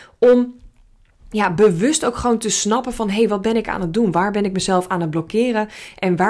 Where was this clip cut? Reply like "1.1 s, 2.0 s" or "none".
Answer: none